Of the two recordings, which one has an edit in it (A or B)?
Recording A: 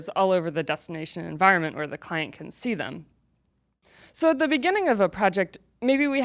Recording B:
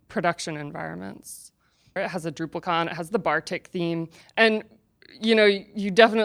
B